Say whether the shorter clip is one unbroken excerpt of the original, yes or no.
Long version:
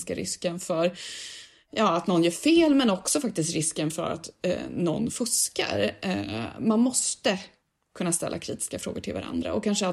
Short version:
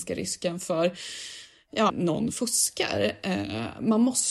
no